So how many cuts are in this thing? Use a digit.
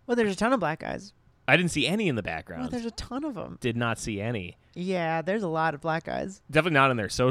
0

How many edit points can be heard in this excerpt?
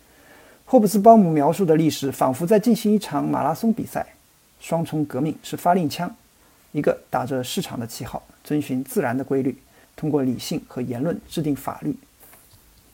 2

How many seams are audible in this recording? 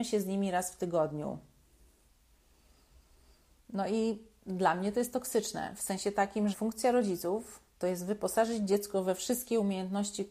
1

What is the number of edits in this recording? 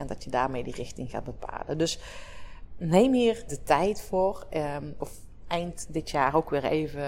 2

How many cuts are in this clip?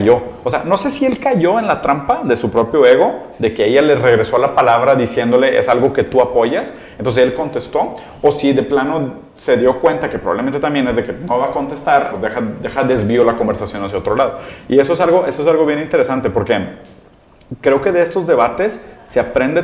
1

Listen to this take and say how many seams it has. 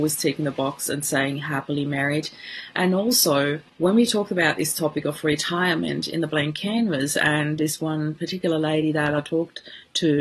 1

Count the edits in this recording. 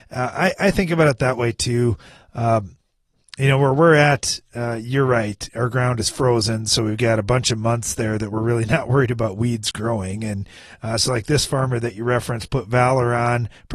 0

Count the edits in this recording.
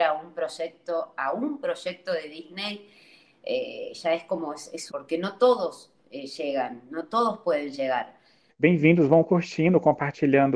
2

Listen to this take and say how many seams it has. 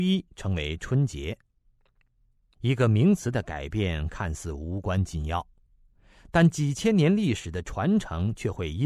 1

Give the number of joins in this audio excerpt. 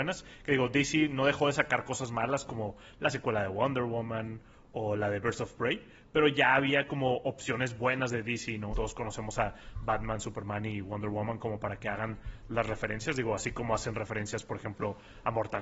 1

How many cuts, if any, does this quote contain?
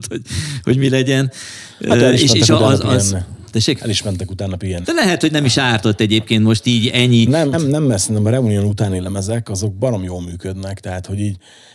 2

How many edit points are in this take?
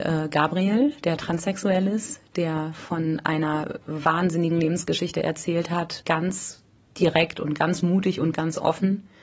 1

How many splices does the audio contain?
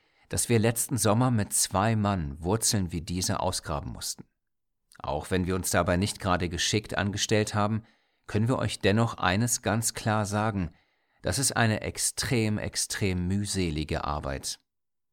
0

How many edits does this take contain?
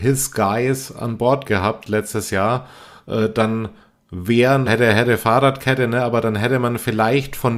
1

